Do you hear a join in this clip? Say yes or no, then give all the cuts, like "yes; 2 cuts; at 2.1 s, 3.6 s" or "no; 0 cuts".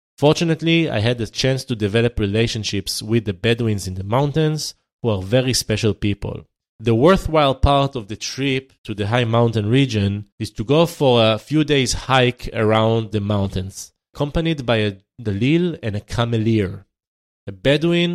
yes; 3 cuts; at 6.7 s, 8.7 s, 10.3 s